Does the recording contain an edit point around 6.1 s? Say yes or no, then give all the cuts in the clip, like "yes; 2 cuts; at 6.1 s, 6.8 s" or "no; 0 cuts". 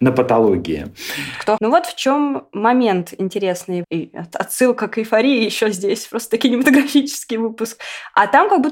no; 2 cuts; at 1.6 s, 3.8 s